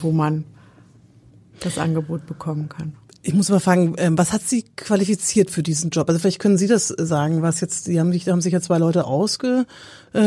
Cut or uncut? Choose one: uncut